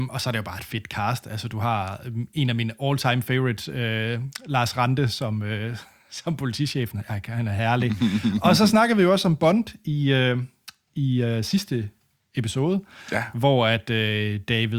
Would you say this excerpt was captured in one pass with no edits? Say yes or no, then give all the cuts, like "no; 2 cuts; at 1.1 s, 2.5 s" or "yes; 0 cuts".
yes; 0 cuts